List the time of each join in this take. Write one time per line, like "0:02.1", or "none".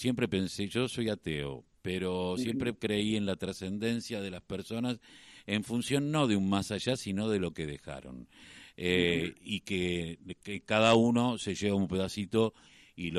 none